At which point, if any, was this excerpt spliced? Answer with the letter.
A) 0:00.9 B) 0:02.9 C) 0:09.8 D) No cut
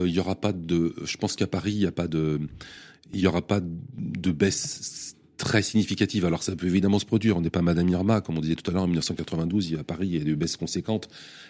D